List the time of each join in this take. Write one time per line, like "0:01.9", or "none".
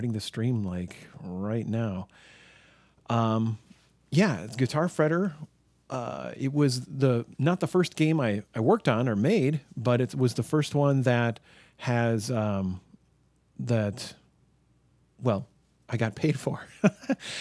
none